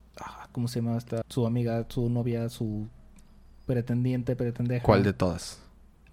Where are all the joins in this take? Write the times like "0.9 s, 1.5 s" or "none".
1.2 s

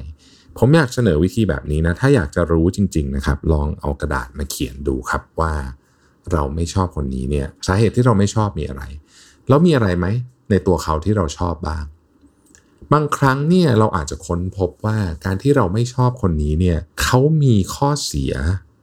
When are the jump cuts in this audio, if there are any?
7.6 s, 16.9 s

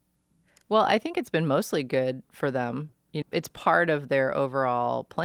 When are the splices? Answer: 3.2 s

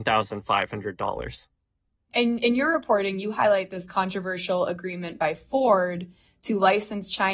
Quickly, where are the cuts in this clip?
none

